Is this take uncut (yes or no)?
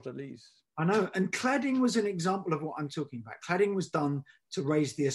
yes